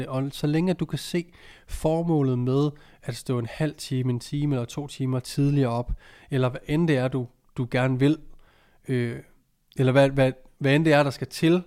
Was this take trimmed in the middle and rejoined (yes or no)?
no